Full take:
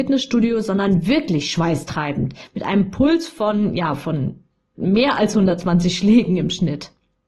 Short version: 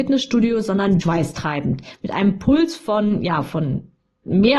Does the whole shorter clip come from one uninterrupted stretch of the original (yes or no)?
no